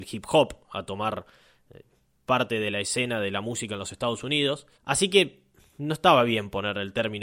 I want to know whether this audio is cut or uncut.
cut